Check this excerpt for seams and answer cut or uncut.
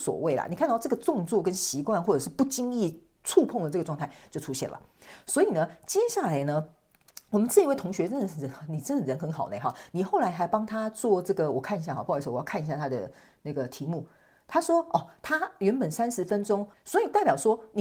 cut